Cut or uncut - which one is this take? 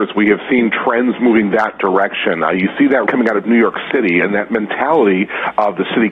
cut